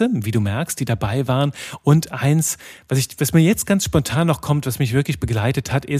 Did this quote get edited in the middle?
no; 0 cuts

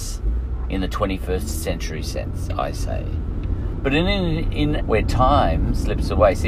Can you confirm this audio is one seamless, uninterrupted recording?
no; 1 cut; at 4.8 s

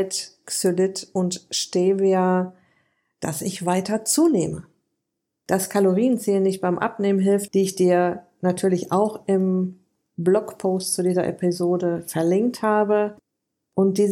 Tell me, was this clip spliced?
yes; 2 cuts; at 5.3 s, 7.5 s

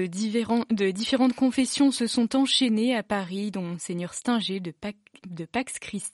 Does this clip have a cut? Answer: no; 0 cuts

